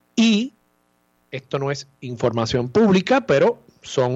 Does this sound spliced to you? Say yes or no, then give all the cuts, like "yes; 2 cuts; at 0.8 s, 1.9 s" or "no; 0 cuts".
no; 0 cuts